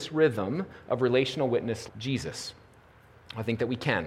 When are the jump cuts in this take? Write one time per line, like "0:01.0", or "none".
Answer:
0:01.9